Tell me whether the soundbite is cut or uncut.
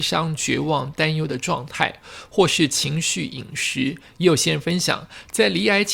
uncut